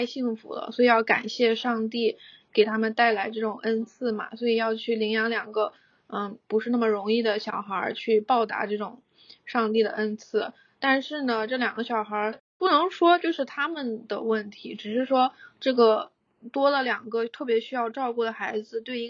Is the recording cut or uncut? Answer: uncut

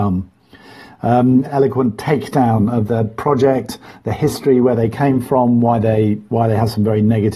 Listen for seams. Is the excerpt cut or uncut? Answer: cut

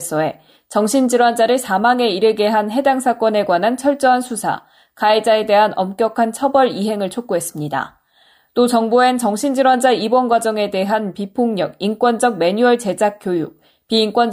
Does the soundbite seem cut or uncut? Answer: uncut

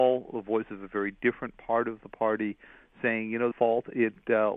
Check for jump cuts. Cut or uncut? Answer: cut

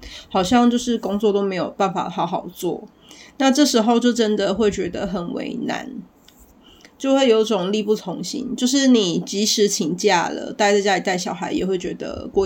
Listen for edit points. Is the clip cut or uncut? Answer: uncut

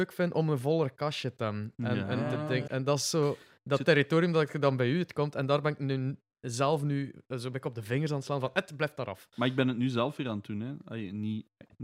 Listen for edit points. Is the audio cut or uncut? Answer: cut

